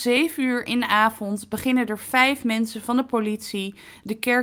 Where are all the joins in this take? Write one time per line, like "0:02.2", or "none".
none